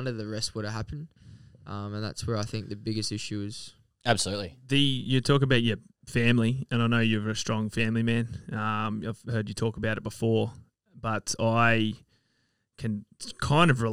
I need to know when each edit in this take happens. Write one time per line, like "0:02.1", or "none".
none